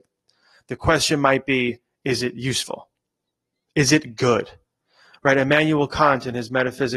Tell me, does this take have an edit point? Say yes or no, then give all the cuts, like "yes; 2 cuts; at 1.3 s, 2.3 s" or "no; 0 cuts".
no; 0 cuts